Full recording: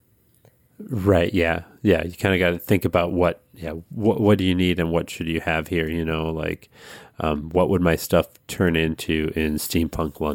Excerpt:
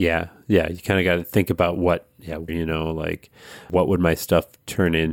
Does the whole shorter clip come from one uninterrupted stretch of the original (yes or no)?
no